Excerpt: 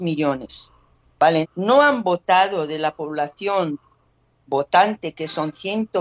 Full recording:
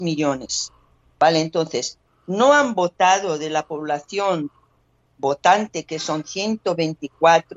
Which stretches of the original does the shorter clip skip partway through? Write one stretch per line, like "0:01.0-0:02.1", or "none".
0:01.4-0:02.1